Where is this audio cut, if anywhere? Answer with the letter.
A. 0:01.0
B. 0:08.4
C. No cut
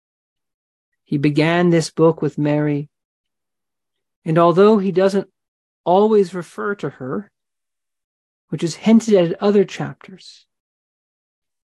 B